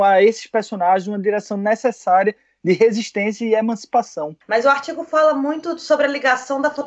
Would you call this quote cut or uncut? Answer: cut